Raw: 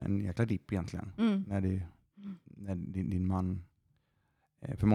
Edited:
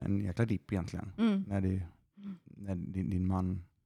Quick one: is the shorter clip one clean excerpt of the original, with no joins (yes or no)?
yes